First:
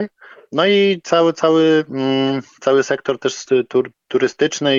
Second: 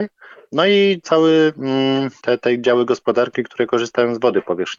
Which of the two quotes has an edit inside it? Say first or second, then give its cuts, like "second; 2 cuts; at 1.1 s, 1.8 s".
second; 2 cuts; at 1.0 s, 2.2 s